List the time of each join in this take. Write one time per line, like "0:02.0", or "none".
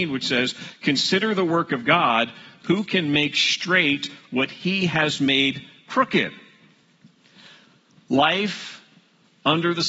none